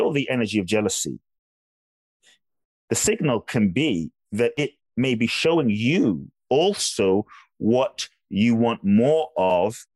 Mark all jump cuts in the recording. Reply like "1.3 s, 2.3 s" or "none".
none